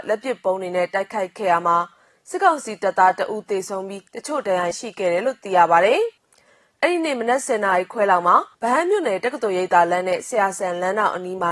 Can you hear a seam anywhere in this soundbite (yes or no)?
yes